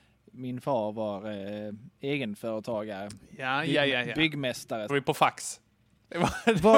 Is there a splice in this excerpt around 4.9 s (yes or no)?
yes